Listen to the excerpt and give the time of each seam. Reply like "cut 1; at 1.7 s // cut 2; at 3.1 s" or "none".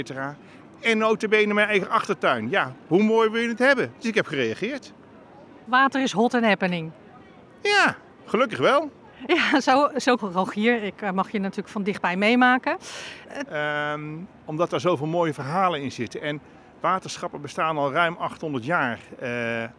cut 1; at 10.2 s // cut 2; at 13.4 s